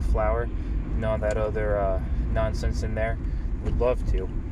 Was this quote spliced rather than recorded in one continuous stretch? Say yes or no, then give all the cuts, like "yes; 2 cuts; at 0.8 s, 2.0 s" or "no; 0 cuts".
yes; 1 cut; at 3.6 s